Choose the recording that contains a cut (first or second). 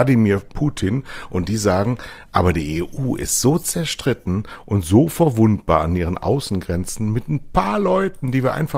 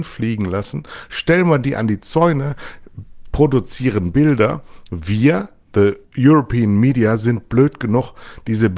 second